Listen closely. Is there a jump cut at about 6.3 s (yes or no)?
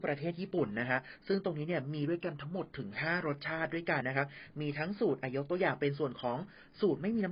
no